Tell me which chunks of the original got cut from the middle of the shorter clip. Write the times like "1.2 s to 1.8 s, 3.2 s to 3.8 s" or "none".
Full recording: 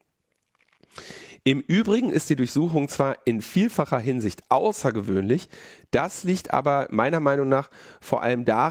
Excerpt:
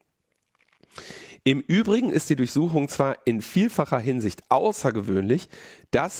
none